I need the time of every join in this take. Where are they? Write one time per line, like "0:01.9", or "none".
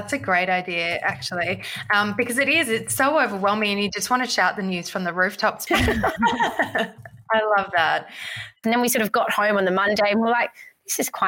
0:05.7
0:08.6